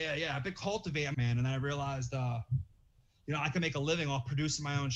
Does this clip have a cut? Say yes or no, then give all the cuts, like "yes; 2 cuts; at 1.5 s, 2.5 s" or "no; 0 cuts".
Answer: yes; 1 cut; at 1.1 s